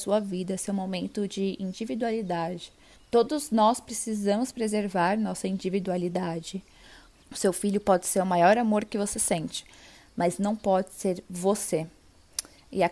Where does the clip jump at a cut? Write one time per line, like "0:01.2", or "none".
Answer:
0:07.1